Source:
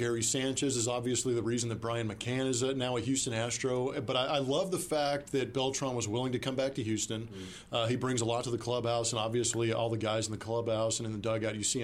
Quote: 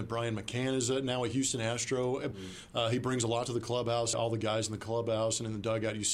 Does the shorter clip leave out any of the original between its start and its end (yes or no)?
yes